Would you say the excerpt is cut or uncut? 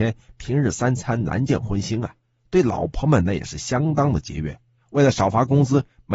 uncut